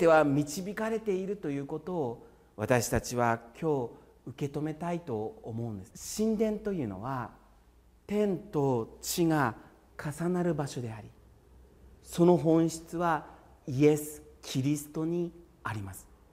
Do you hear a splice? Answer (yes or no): yes